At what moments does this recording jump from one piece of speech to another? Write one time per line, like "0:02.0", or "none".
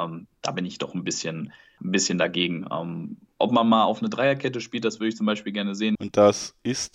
0:01.8
0:06.0